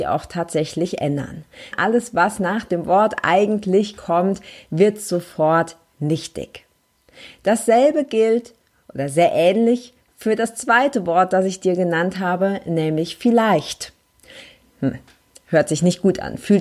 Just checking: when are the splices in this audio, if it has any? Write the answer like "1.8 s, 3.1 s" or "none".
1.7 s, 14.6 s